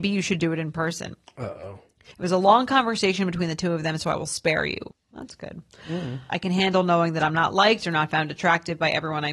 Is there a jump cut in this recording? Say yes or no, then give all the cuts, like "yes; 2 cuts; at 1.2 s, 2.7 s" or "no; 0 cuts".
yes; 3 cuts; at 2.1 s, 4.9 s, 6.3 s